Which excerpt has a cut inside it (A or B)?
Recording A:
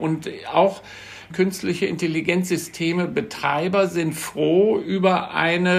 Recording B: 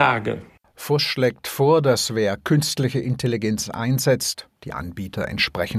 B